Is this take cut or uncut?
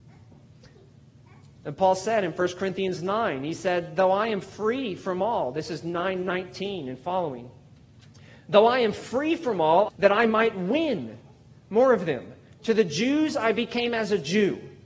cut